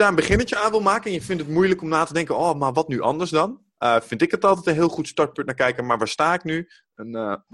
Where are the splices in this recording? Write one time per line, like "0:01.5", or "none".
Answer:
none